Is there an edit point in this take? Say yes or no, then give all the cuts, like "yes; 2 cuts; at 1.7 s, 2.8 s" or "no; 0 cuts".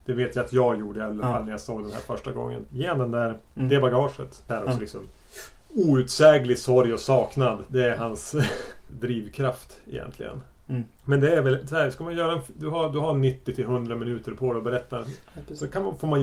yes; 3 cuts; at 2.7 s, 4.5 s, 15.3 s